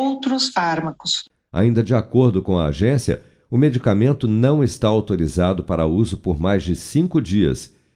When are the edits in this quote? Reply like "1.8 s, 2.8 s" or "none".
1.5 s